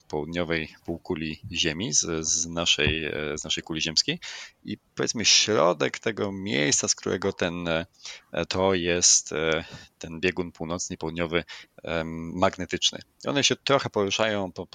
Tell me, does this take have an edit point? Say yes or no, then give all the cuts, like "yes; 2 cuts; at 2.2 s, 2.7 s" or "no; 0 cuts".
yes; 1 cut; at 8.5 s